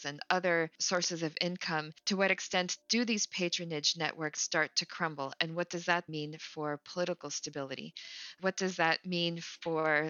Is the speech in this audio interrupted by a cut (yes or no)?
yes